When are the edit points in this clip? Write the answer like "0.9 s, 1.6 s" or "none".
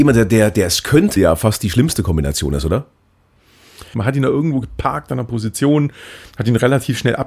1.2 s, 3.9 s